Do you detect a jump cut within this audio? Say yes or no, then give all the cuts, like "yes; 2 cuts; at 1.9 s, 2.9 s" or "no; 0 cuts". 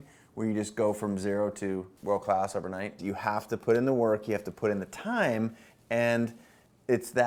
yes; 1 cut; at 3.0 s